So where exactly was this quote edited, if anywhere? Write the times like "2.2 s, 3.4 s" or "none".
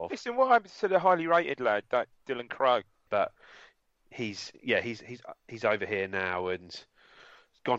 3.1 s